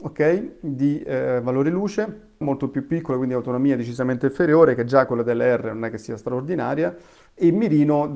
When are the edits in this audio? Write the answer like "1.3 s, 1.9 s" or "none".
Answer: 2.4 s

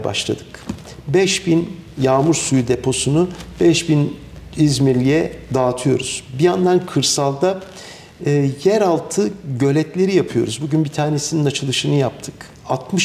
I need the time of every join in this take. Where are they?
none

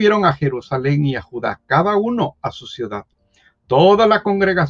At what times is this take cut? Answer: none

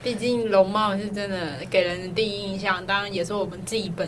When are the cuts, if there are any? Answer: none

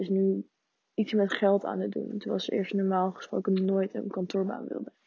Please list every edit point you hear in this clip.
none

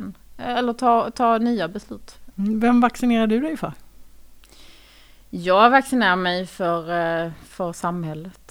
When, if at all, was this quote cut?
2.3 s

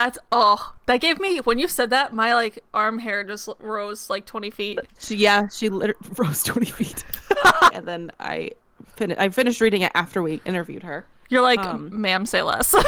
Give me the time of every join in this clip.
7.7 s

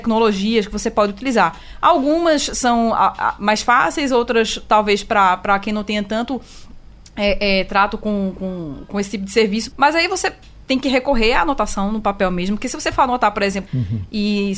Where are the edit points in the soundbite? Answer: 9.7 s, 13.7 s

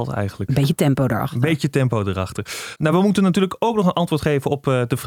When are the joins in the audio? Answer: none

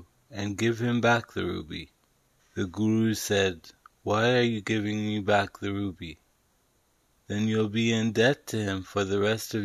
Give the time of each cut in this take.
2.4 s, 7.1 s

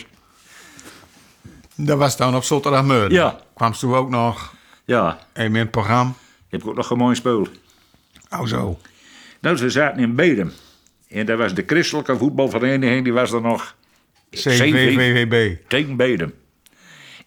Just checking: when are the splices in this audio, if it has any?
none

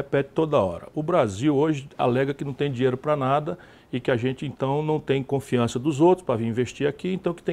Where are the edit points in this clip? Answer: none

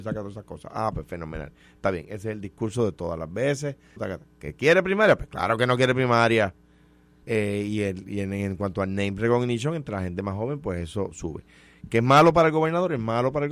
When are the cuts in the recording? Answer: 4.0 s, 7.2 s

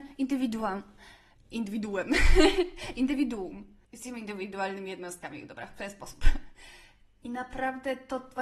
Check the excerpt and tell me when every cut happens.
none

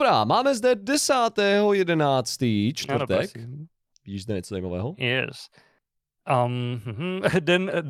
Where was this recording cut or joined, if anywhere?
none

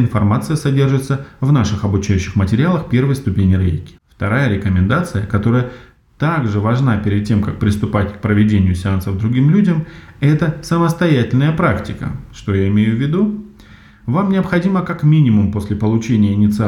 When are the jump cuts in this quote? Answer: 4.0 s

